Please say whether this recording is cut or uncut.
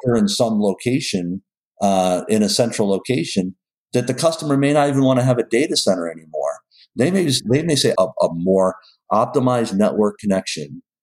cut